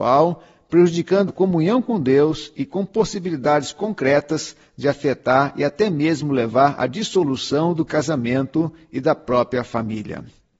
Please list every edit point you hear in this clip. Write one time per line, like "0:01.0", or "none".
0:01.3

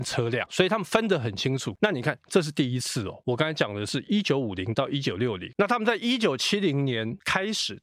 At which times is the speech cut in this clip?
none

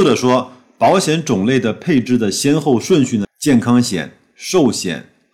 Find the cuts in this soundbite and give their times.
0:03.2

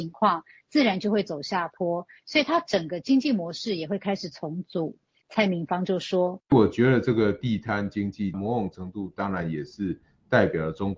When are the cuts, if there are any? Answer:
0:05.2

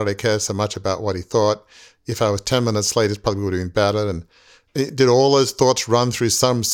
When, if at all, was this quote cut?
none

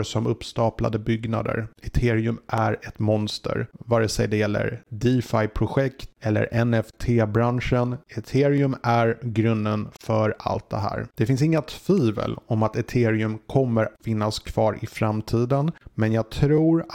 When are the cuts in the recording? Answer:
none

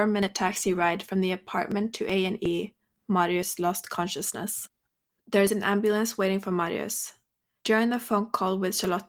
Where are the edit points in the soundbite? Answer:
0:05.1

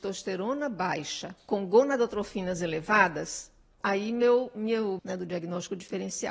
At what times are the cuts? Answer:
0:03.8
0:05.0

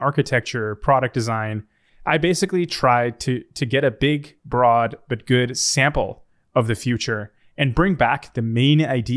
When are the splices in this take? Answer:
0:01.9

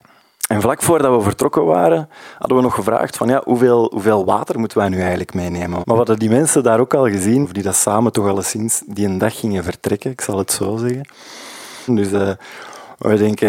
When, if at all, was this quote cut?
0:05.8
0:07.4
0:11.9

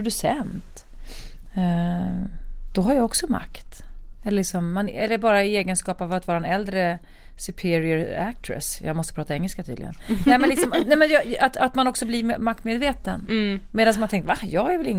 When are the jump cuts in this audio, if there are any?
none

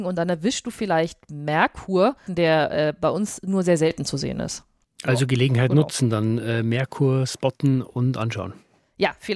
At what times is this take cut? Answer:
0:02.3

